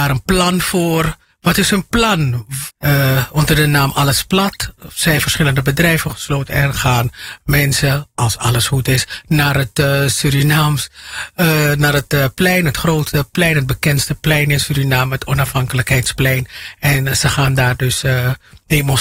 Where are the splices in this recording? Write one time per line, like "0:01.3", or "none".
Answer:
0:02.7

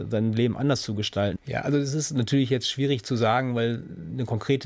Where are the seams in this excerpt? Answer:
0:01.4

